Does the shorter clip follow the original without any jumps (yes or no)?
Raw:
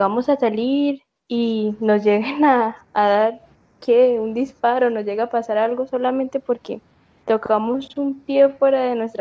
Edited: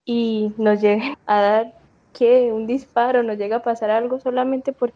no